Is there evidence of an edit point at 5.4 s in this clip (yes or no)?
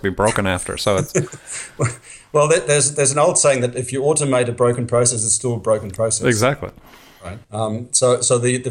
no